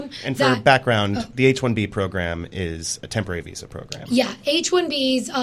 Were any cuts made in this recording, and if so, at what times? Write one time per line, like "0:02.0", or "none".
none